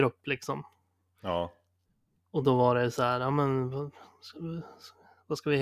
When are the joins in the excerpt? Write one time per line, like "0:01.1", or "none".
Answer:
none